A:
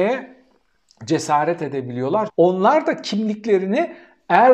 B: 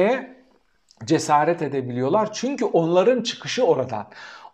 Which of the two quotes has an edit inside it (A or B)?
A